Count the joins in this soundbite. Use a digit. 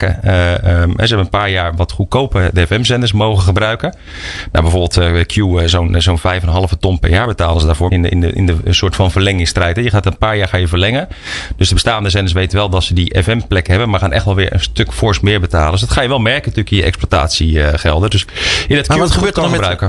1